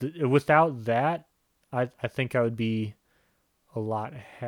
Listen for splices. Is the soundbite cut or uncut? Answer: uncut